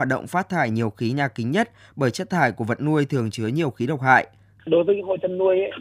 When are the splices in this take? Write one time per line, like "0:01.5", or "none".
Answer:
0:04.6